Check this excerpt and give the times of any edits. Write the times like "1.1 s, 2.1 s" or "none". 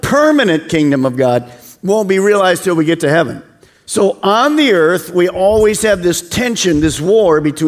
none